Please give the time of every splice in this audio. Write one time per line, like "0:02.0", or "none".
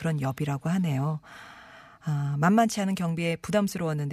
none